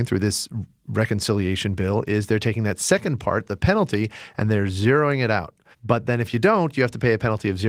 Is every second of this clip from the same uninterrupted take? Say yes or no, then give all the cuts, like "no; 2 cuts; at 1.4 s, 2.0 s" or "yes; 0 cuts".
no; 1 cut; at 5.7 s